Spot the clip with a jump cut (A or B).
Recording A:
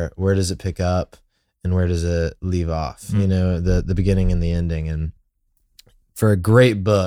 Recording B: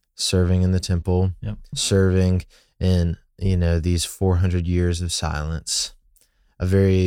B